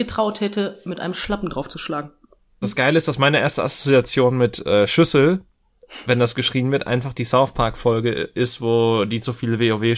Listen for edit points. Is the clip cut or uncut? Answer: cut